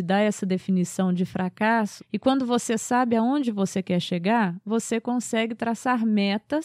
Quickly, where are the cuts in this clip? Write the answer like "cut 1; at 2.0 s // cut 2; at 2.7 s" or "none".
cut 1; at 2.0 s

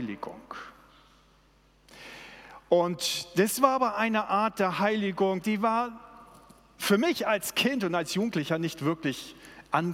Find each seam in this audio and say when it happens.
cut 1; at 5.4 s

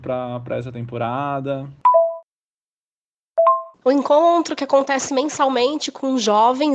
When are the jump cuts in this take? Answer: cut 1; at 3.7 s

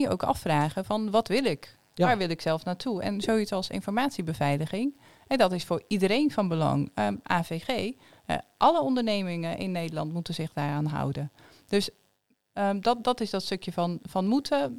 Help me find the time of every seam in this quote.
none

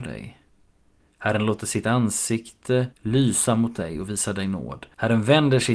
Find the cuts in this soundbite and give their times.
cut 1; at 2.9 s

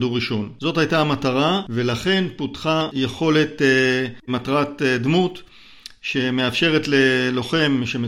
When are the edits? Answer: cut 1; at 4.3 s

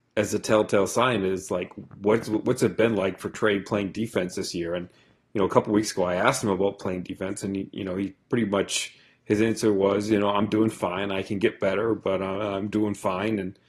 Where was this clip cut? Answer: none

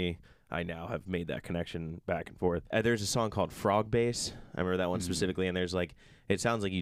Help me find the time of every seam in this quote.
cut 1; at 2.7 s

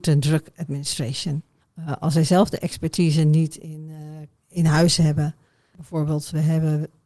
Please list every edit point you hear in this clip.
cut 1; at 1.6 s // cut 2; at 4.4 s

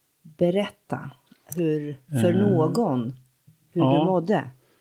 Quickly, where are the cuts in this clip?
none

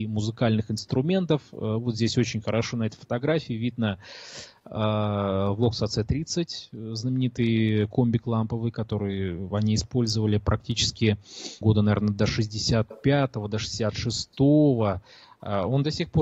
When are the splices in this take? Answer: cut 1; at 11.6 s

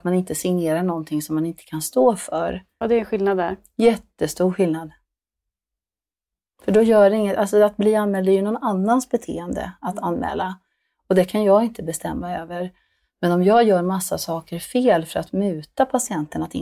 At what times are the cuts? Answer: cut 1; at 2.8 s

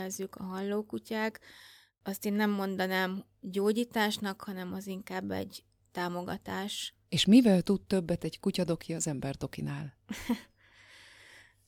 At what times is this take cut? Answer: cut 1; at 7.0 s

